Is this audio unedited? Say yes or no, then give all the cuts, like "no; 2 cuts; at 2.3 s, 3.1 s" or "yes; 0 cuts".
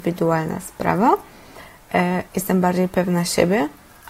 no; 1 cut; at 2.3 s